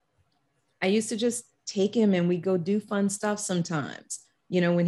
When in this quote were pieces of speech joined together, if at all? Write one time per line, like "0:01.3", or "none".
none